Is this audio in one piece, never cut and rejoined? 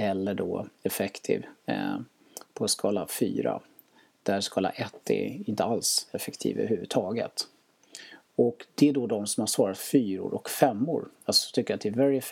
yes; 0 cuts

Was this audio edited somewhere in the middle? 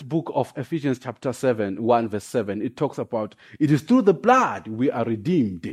no; 0 cuts

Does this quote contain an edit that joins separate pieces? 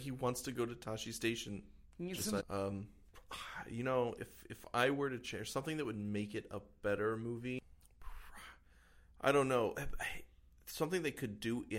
yes; 1 cut; at 2.4 s

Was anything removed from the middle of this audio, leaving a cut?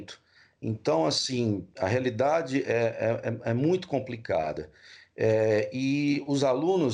no; 0 cuts

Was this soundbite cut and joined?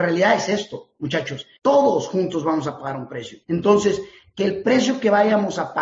yes; 2 cuts; at 1.6 s, 3.4 s

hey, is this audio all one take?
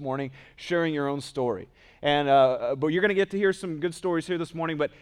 yes; 0 cuts

